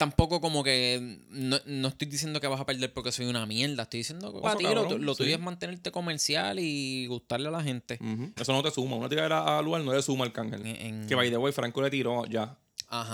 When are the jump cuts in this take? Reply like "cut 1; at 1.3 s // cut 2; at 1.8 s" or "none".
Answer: cut 1; at 4.4 s // cut 2; at 8.4 s // cut 3; at 10.6 s

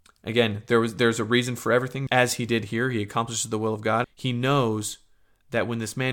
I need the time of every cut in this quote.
cut 1; at 2.1 s // cut 2; at 4.0 s

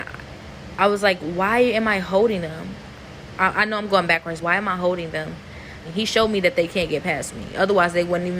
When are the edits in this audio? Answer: cut 1; at 4.4 s // cut 2; at 5.8 s

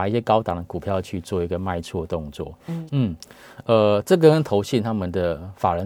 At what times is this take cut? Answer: cut 1; at 2.9 s

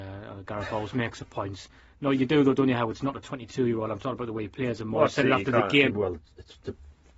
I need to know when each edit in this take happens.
cut 1; at 5.9 s

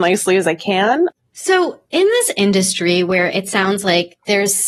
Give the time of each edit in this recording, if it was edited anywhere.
cut 1; at 1.1 s

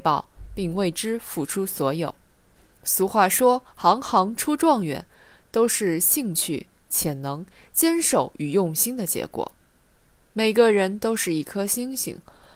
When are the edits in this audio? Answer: cut 1; at 5.4 s

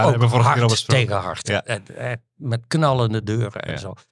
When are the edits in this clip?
none

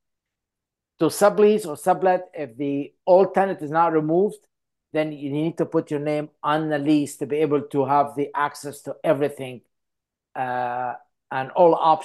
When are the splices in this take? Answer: none

